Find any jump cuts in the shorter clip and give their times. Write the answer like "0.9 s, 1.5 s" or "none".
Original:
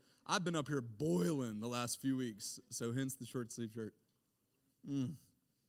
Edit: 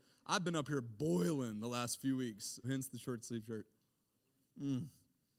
2.6 s